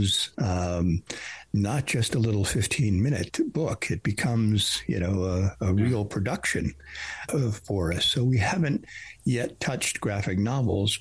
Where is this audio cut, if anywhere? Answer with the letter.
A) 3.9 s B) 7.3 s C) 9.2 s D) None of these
B